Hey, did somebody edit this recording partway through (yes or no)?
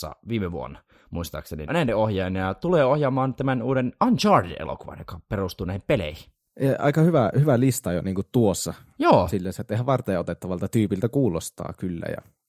yes